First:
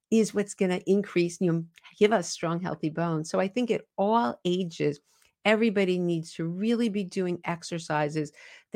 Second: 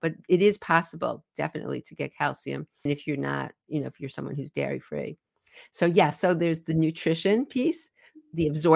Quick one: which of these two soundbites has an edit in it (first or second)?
second